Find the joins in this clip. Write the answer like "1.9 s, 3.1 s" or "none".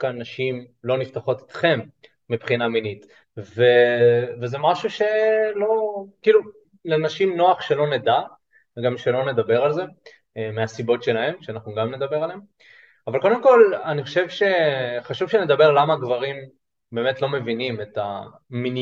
3.2 s